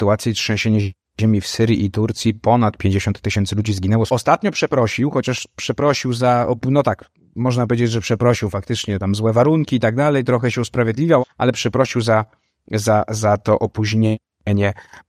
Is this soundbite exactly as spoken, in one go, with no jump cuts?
no; 2 cuts; at 4.1 s, 11.2 s

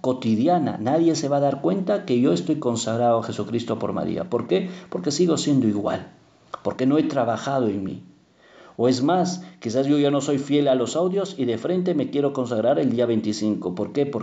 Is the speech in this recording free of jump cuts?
yes; 0 cuts

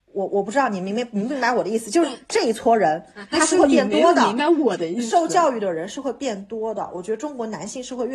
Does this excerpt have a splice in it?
yes; 1 cut; at 3.3 s

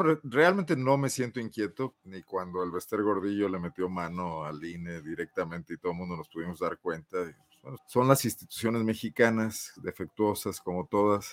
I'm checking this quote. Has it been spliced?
yes; 2 cuts; at 1.9 s, 7.8 s

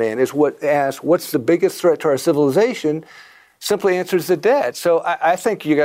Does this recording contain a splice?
no; 0 cuts

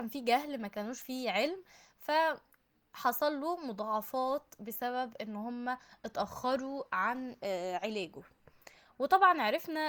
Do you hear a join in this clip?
no; 0 cuts

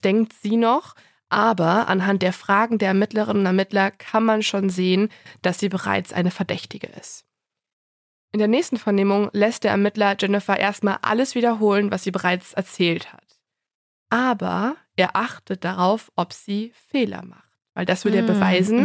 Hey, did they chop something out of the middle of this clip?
no; 0 cuts

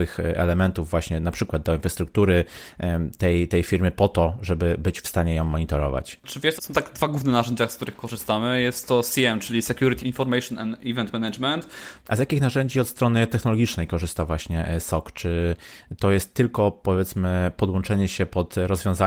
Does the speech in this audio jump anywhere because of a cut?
yes; 3 cuts; at 6.6 s, 10.0 s, 12.0 s

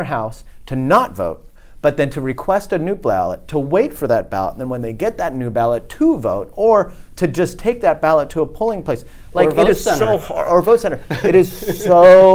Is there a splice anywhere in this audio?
no; 0 cuts

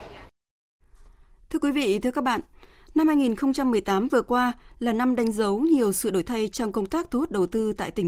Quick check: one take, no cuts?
yes; 0 cuts

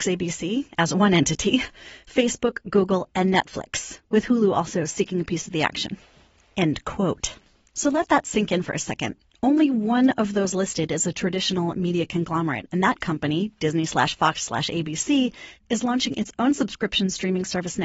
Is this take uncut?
yes; 0 cuts

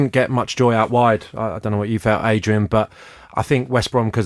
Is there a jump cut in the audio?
no; 0 cuts

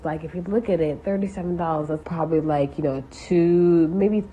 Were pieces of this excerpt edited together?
yes; 1 cut; at 2.0 s

